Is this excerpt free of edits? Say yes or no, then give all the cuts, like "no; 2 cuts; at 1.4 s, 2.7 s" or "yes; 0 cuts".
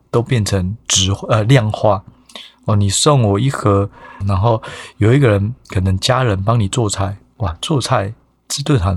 no; 1 cut; at 4.2 s